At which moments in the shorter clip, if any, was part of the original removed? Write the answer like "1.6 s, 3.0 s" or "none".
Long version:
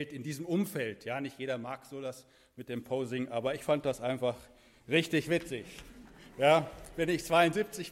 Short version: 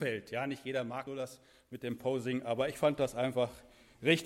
1.1 s